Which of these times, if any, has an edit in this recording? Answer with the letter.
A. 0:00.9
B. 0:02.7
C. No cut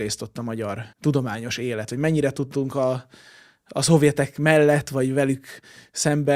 A